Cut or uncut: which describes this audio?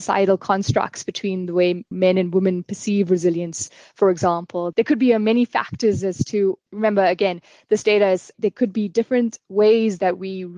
cut